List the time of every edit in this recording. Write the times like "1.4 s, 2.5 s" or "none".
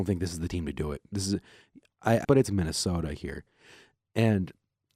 2.2 s